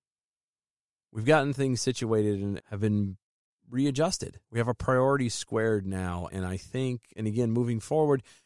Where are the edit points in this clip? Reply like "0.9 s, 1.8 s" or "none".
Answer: 2.6 s, 4.4 s, 6.3 s